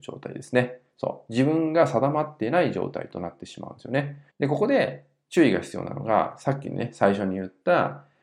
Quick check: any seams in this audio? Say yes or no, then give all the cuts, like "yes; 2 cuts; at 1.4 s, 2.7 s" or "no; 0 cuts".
yes; 1 cut; at 4.3 s